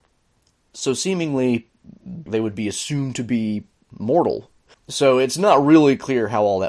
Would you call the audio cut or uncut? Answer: cut